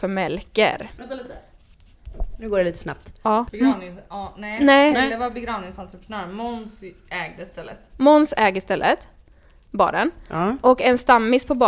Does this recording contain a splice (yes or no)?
yes